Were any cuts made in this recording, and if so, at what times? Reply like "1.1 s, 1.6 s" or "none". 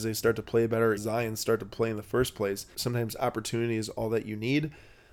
1.0 s, 2.7 s